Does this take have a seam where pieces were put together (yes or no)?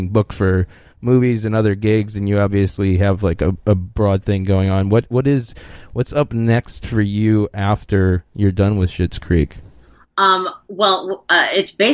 no